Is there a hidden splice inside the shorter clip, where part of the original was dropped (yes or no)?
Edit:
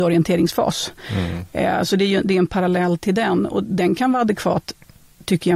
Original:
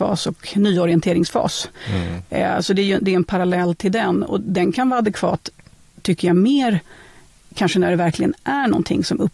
no